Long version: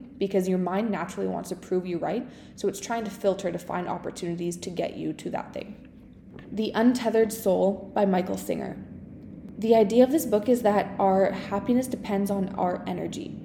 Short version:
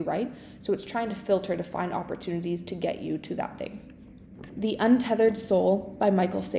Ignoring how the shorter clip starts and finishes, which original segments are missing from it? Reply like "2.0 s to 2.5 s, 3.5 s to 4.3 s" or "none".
none